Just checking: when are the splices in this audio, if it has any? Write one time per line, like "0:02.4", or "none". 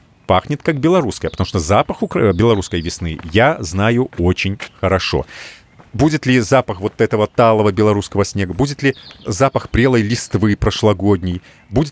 none